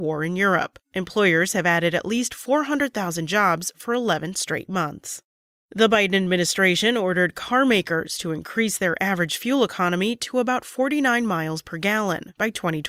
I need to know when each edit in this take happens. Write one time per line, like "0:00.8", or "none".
none